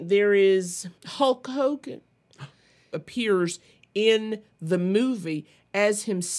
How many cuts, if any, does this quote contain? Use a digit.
2